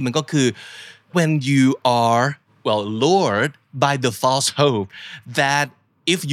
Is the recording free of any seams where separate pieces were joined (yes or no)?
no